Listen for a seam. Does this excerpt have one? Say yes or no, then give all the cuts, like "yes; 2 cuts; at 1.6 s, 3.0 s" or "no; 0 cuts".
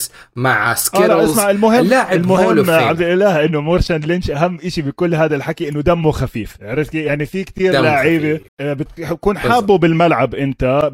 yes; 1 cut; at 8.5 s